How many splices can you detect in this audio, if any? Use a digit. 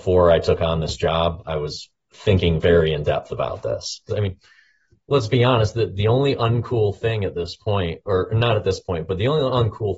1